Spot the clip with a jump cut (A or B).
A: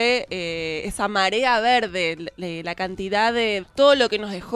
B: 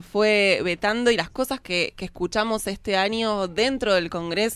A